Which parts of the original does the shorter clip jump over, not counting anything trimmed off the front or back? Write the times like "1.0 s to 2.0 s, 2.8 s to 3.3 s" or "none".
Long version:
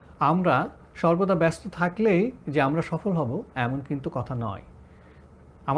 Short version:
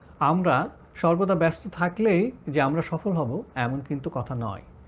none